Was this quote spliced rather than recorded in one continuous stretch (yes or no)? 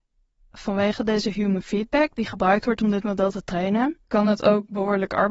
yes